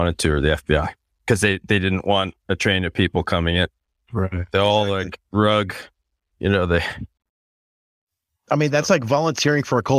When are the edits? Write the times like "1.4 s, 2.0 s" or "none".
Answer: none